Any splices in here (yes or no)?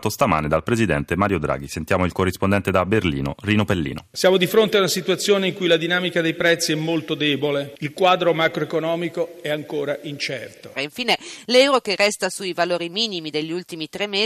yes